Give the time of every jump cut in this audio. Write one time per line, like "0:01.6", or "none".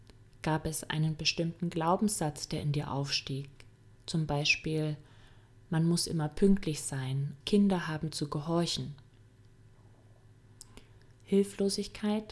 0:07.4
0:11.1